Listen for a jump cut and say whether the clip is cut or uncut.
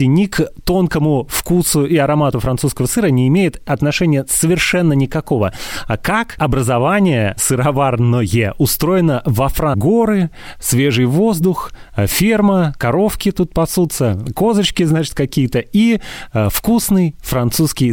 cut